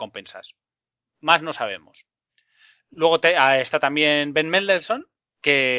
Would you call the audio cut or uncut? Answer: uncut